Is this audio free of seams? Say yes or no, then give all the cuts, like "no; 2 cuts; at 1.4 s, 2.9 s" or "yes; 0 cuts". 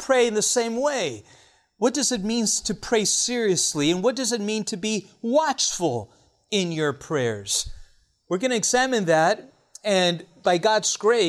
yes; 0 cuts